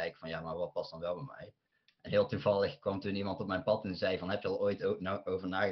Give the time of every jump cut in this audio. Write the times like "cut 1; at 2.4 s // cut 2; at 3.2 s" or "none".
none